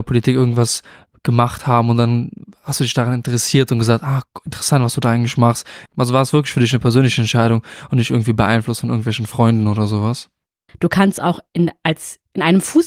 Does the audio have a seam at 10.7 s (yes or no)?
yes